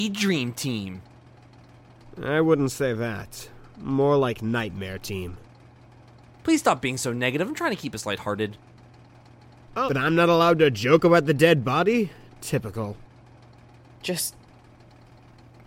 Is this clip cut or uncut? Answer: cut